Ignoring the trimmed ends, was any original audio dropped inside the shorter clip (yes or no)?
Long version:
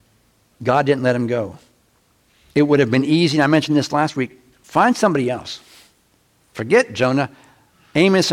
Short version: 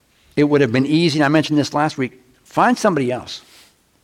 no